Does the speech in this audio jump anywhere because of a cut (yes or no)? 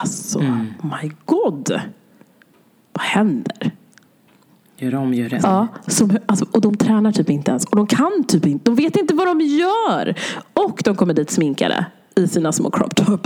yes